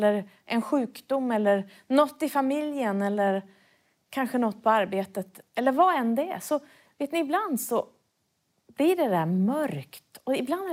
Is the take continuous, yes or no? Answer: yes